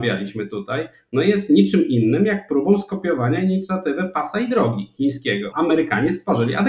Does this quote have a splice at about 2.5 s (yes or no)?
no